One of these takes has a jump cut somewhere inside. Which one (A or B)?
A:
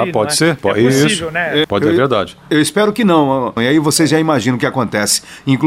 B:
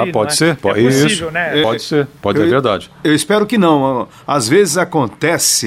A